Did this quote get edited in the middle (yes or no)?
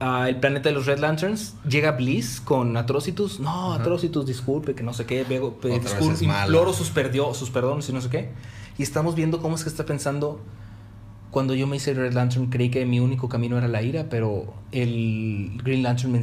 no